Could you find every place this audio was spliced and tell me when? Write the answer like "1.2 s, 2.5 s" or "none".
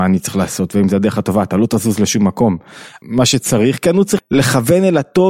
3.0 s, 4.2 s